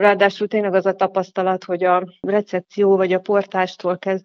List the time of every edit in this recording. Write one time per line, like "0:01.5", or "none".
none